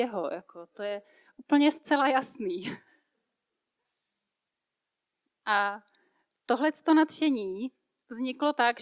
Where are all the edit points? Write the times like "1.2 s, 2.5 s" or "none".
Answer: none